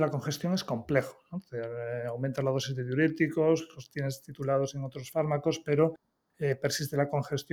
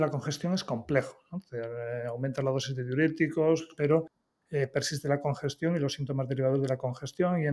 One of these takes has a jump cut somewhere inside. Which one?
second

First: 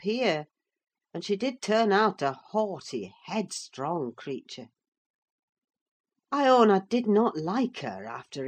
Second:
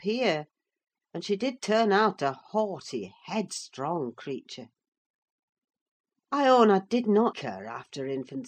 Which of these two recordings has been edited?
second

